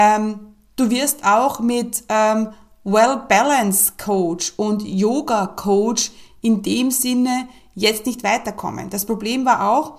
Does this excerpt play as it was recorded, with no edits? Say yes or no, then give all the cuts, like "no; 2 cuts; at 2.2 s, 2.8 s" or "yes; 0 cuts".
yes; 0 cuts